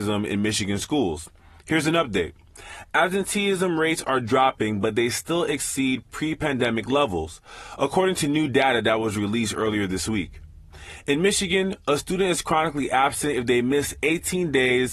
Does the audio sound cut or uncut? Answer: uncut